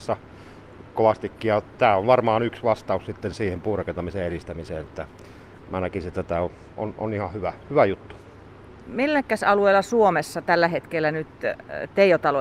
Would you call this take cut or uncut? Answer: uncut